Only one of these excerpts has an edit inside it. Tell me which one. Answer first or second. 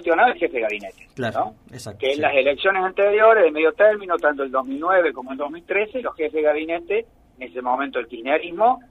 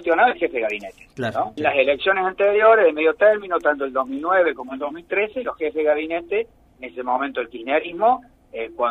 second